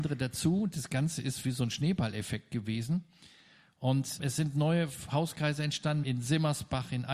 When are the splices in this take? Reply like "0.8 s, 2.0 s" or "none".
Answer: 4.2 s, 6.0 s